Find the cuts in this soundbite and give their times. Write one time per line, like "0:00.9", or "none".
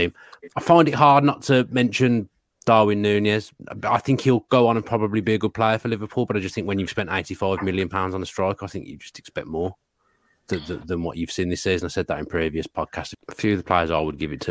0:13.1